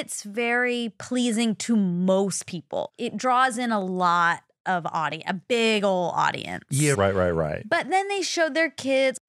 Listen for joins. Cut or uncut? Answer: cut